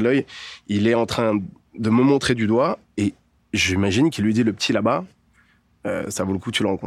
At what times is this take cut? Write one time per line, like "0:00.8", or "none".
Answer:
none